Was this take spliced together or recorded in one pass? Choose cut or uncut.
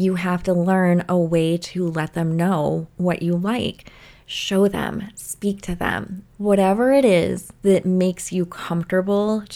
cut